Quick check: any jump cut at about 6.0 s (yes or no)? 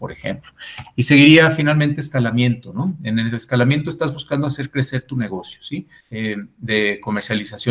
yes